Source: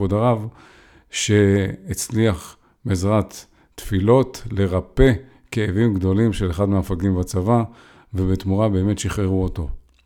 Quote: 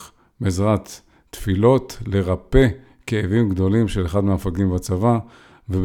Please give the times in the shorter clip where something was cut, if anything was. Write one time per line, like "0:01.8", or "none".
none